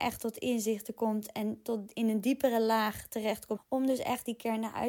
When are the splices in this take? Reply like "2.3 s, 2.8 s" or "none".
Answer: 3.6 s